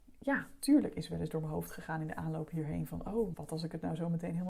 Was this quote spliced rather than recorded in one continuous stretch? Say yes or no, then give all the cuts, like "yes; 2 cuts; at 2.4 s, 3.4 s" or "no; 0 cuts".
yes; 1 cut; at 3.3 s